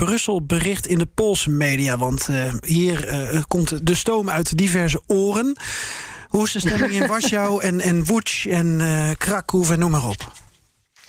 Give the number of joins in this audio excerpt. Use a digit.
2